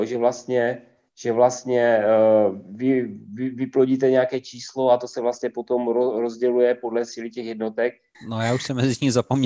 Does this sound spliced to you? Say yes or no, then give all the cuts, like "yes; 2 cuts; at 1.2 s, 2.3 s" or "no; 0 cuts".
yes; 1 cut; at 8.1 s